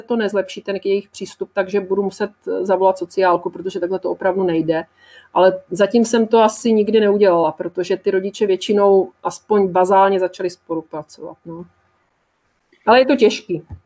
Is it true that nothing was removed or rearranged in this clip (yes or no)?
yes